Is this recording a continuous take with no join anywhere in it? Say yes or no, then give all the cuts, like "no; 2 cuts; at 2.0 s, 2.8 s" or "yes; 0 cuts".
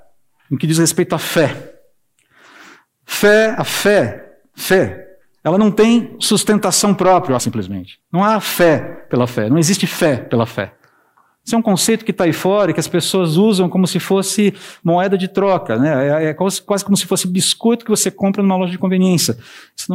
no; 1 cut; at 7.4 s